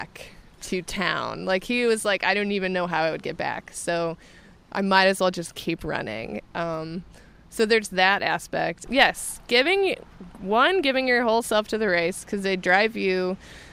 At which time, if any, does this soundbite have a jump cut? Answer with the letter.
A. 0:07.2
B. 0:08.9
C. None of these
B